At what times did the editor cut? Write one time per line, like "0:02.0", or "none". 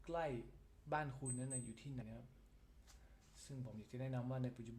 0:02.0